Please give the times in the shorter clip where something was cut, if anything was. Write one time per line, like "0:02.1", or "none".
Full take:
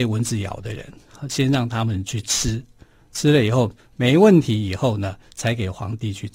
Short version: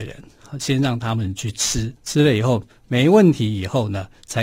0:02.0